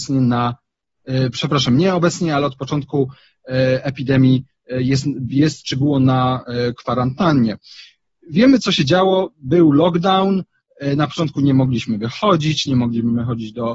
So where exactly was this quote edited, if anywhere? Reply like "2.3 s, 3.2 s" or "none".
none